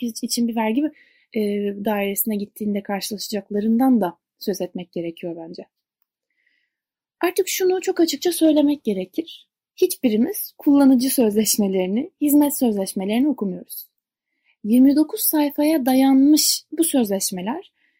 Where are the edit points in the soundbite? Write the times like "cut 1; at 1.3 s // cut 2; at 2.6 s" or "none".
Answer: none